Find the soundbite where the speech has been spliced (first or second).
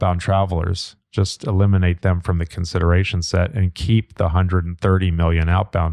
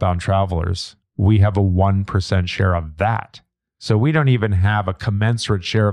second